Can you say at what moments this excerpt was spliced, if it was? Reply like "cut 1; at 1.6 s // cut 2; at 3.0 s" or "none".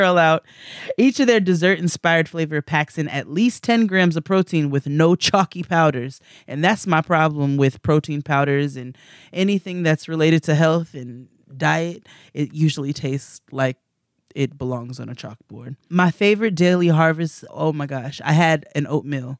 cut 1; at 17.5 s